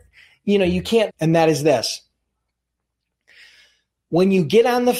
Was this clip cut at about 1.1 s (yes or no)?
yes